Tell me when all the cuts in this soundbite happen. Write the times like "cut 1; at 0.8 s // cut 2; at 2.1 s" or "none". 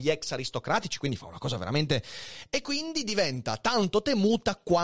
none

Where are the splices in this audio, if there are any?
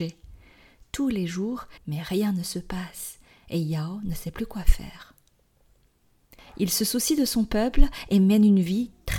cut 1; at 1.8 s // cut 2; at 6.4 s

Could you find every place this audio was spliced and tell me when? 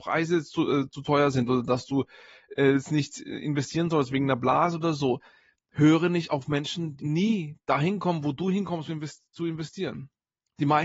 cut 1; at 7.0 s // cut 2; at 8.9 s

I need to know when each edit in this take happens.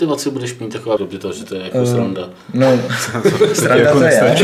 cut 1; at 1.0 s

